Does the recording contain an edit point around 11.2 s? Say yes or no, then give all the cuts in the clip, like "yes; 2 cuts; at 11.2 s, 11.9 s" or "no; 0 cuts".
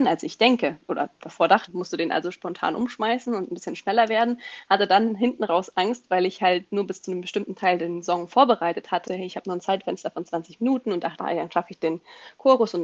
yes; 3 cuts; at 1.7 s, 9.1 s, 11.2 s